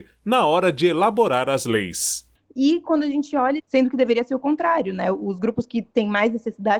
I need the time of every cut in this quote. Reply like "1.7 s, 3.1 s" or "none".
2.3 s, 3.6 s